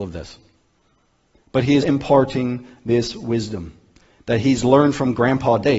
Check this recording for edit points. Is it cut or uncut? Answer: cut